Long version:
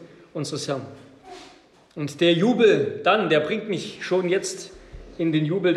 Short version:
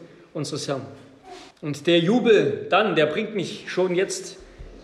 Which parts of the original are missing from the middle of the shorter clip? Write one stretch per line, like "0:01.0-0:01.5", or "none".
0:01.5-0:01.8